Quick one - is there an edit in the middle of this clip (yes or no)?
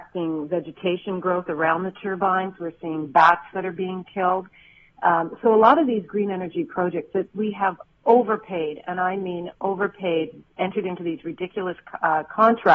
no